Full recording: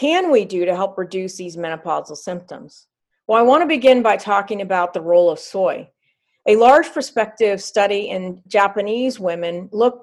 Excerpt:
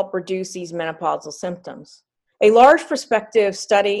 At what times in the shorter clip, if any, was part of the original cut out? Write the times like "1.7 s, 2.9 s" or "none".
2.3 s

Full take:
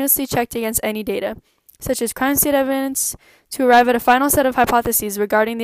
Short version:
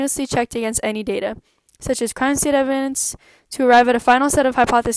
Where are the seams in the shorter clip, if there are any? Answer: none

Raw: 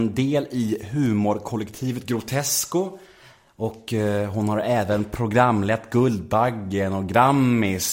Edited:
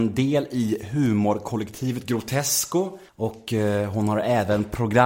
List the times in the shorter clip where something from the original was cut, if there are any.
3.1 s

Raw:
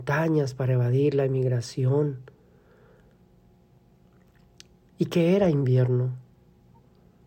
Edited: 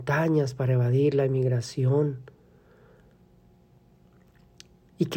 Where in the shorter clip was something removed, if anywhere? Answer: none

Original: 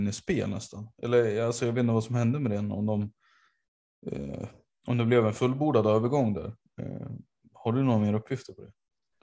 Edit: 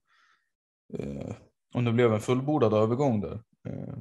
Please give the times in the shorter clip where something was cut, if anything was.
none

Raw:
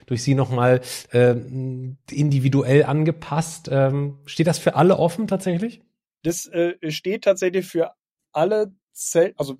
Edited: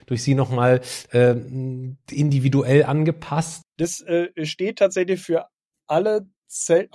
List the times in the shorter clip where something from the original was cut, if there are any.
3.6 s

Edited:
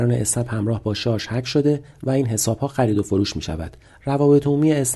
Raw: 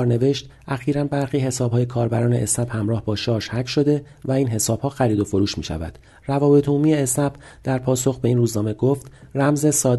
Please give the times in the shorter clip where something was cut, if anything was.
none

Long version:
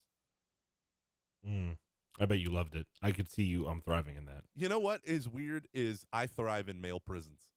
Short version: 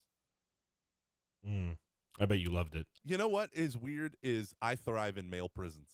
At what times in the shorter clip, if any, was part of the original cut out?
3.0 s

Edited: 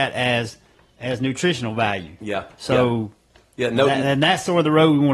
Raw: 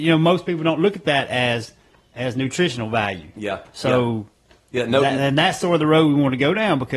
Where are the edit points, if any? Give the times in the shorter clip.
none

